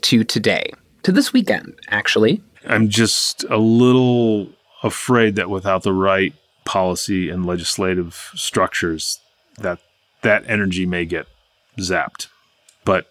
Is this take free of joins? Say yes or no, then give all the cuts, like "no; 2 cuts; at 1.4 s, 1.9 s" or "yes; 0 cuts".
no; 1 cut; at 2.5 s